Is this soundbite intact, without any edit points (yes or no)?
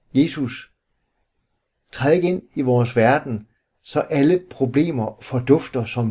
yes